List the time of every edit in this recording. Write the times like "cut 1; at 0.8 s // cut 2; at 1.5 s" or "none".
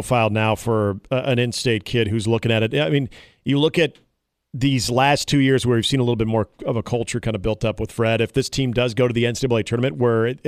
none